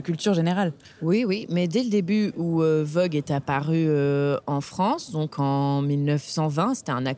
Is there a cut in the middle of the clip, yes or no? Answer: no